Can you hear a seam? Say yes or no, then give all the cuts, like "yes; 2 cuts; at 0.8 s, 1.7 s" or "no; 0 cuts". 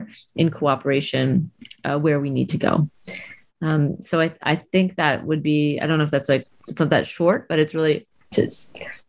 no; 0 cuts